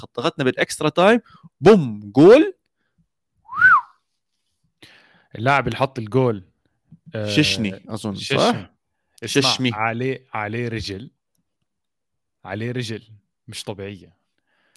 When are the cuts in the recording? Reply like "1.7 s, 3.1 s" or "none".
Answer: none